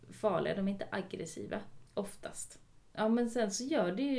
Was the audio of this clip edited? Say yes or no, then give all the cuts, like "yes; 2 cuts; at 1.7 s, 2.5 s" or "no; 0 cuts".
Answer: no; 0 cuts